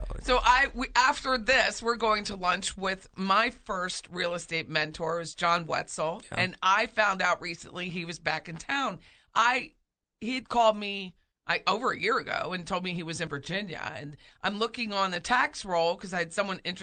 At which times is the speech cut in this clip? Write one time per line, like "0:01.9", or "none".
none